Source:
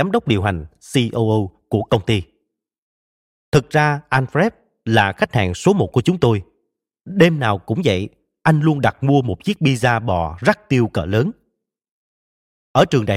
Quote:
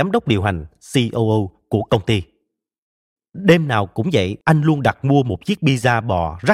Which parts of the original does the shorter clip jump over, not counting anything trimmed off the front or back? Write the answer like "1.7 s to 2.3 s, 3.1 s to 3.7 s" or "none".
3.2 s to 6.9 s, 8.1 s to 8.4 s